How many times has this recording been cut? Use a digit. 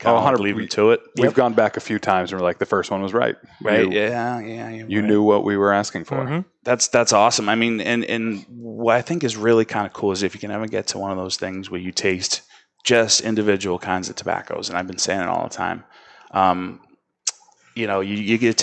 0